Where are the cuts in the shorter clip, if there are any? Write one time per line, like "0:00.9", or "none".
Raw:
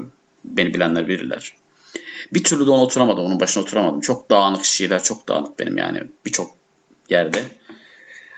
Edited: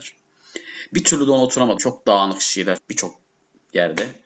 0:01.8
0:02.8